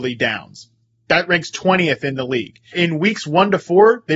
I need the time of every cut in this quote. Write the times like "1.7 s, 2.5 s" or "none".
2.7 s